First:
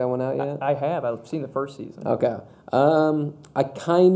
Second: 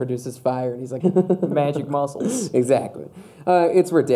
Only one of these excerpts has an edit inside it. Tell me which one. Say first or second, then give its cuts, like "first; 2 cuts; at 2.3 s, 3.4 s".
second; 1 cut; at 1.0 s